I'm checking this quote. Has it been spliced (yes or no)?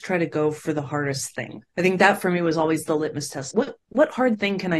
yes